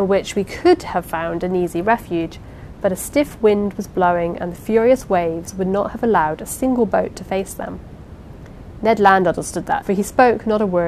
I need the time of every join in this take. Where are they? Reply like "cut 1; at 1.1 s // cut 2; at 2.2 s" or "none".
cut 1; at 9.8 s